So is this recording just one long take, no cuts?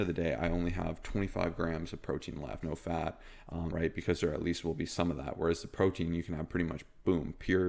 no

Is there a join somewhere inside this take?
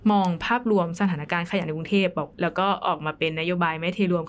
yes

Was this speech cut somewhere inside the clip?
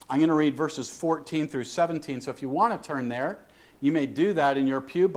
no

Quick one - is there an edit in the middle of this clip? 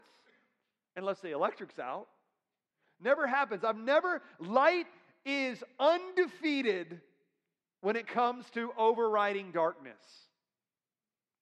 no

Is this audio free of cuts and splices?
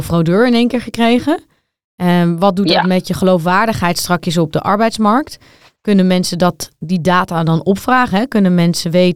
yes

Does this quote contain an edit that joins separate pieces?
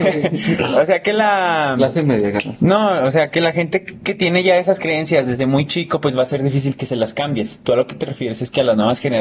no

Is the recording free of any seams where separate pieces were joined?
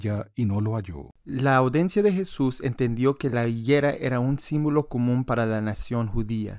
no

